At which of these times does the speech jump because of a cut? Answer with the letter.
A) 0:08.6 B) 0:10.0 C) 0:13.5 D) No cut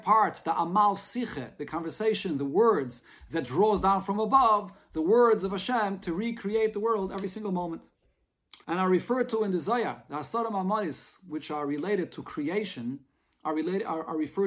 A